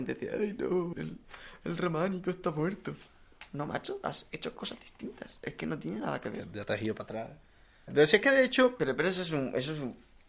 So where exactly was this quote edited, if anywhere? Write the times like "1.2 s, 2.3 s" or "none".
0.9 s, 7.9 s